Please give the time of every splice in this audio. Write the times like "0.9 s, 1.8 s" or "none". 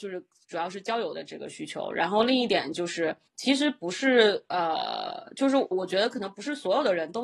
3.3 s, 5.7 s